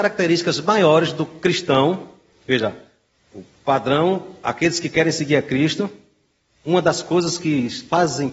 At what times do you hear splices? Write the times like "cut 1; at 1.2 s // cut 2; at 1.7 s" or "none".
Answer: cut 1; at 6.5 s

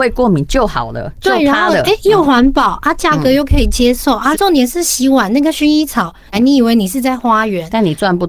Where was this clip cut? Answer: cut 1; at 4.3 s // cut 2; at 6.3 s

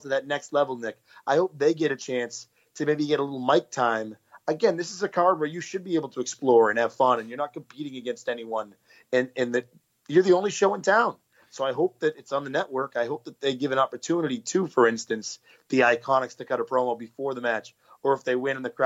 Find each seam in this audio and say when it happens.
none

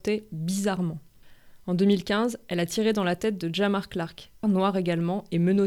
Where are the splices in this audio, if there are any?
cut 1; at 4.4 s

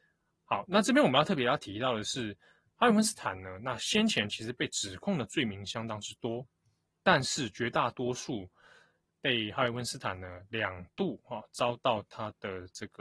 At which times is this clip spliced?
cut 1; at 9.1 s

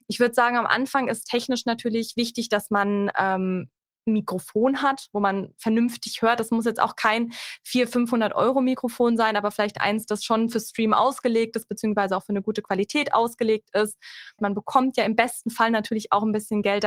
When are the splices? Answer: cut 1; at 14.4 s

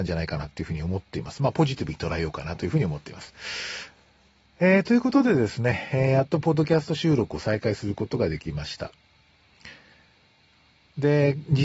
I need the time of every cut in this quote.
none

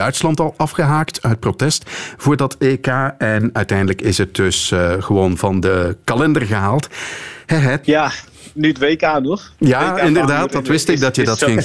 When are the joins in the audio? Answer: cut 1; at 7.8 s

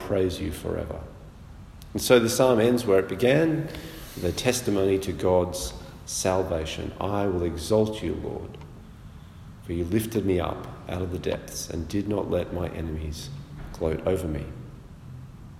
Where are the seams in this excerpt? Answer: none

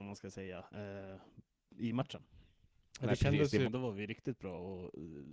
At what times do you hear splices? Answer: cut 1; at 3.6 s

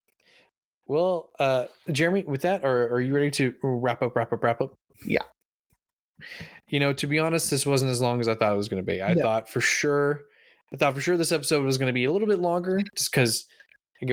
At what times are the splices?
none

